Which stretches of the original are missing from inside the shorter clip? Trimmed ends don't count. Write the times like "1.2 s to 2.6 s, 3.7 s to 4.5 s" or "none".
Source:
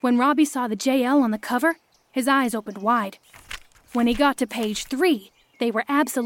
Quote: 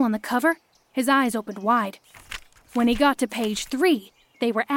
none